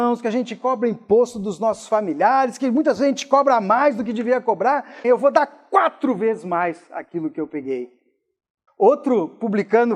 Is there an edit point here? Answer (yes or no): yes